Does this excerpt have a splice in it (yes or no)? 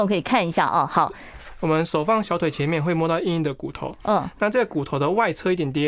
no